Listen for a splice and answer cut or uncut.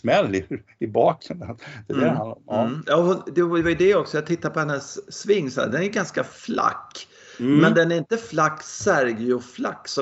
uncut